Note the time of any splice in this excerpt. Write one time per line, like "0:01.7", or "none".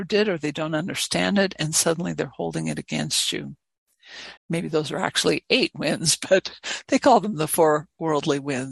0:04.4